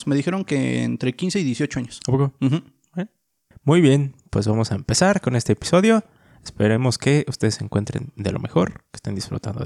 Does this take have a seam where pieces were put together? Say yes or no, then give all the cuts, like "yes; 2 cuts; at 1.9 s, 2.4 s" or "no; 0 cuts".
yes; 1 cut; at 3.5 s